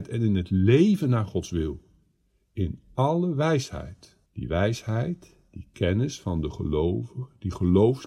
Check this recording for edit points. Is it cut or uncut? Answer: cut